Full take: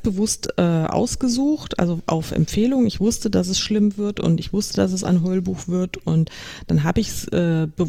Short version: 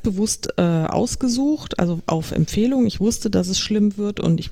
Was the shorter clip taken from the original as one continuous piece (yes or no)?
yes